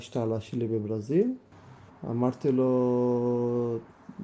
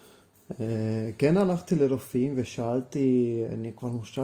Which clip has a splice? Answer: first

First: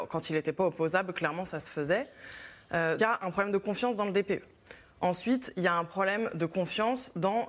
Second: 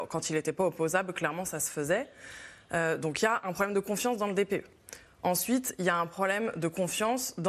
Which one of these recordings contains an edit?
first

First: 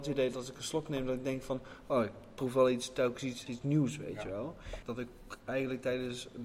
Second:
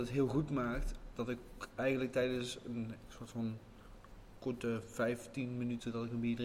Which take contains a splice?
first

